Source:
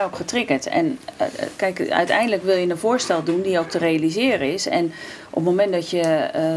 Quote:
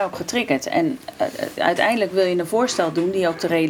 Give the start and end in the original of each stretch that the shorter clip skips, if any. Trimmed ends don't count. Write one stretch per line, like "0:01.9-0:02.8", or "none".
0:01.6-0:01.9